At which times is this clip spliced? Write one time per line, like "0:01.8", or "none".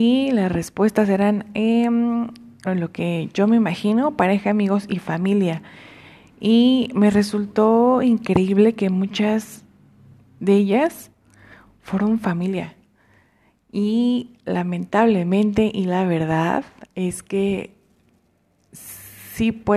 0:02.7